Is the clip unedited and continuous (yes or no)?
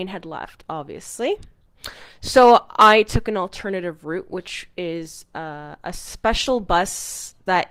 yes